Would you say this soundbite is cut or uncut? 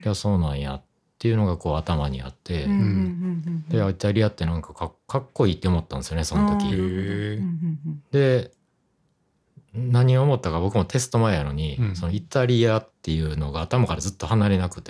uncut